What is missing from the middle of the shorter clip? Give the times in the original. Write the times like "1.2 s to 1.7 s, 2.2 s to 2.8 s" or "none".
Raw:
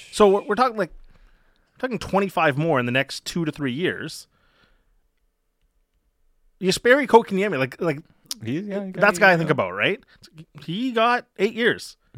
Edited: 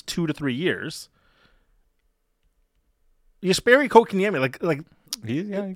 none